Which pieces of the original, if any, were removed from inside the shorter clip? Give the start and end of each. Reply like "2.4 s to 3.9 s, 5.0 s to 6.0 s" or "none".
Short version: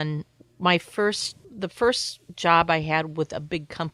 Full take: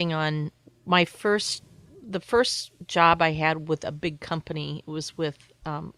1.7 s to 2.0 s